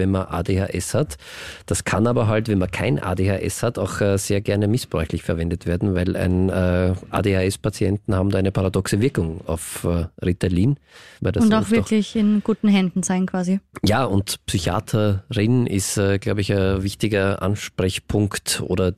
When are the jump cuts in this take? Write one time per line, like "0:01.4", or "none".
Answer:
0:11.2